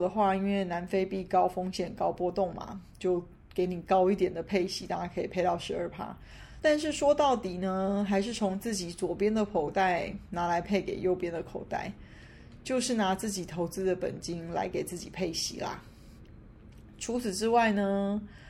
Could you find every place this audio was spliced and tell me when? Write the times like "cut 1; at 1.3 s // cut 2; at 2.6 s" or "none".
cut 1; at 6.6 s